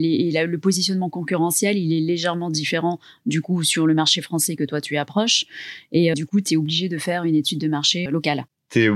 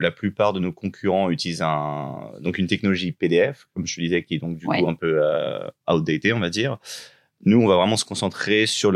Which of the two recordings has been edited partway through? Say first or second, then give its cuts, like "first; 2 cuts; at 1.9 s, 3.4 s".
first; 2 cuts; at 6.1 s, 8.1 s